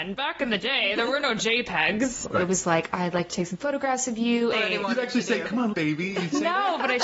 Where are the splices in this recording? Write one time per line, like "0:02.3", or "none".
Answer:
0:02.2
0:04.5
0:05.7